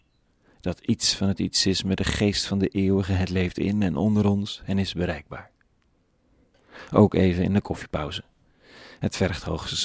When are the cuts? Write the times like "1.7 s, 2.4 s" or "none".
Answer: none